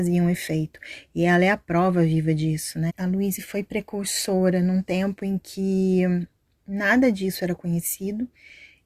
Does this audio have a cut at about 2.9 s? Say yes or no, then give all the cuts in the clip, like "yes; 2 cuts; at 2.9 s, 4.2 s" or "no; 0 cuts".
yes; 1 cut; at 2.9 s